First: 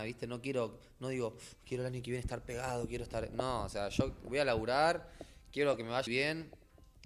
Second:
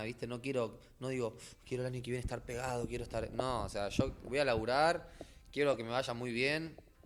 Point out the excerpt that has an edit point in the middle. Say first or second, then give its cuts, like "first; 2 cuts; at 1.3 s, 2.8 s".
first; 1 cut; at 6.1 s